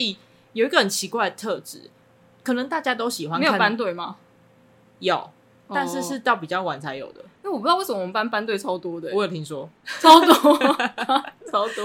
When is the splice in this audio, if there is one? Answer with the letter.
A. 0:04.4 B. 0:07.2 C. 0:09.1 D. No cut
D